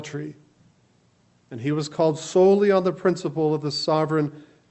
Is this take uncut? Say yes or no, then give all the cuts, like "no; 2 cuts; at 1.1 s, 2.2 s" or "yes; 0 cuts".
yes; 0 cuts